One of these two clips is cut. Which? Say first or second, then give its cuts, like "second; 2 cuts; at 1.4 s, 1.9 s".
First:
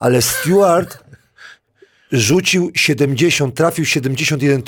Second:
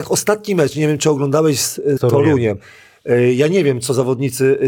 second; 1 cut; at 2.0 s